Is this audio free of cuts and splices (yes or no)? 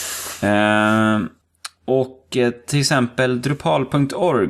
yes